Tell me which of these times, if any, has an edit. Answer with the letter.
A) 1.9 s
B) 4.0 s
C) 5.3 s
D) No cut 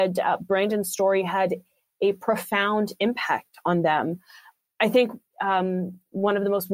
C